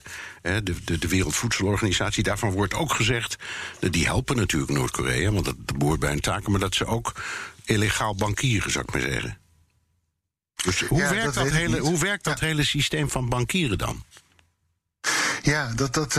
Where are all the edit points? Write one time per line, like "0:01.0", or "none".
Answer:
none